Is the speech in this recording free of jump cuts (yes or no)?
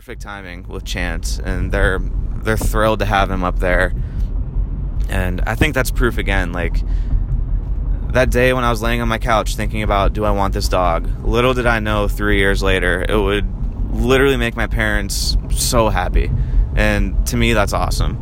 yes